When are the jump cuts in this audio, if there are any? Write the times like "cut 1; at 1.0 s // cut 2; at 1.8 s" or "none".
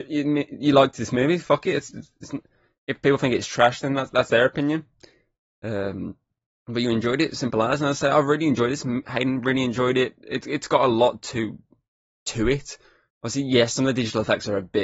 none